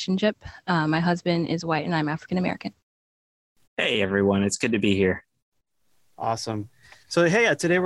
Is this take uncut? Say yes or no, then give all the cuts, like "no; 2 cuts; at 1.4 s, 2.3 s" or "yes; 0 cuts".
no; 1 cut; at 3.7 s